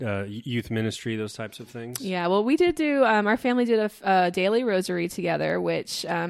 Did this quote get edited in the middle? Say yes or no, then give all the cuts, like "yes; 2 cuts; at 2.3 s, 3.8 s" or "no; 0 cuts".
no; 0 cuts